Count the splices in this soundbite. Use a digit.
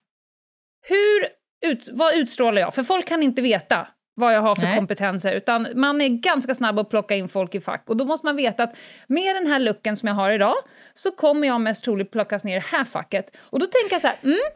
1